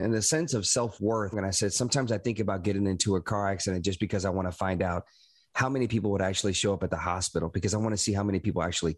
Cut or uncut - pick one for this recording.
cut